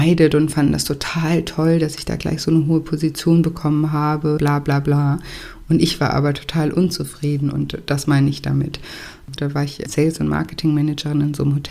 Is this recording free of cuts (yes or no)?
no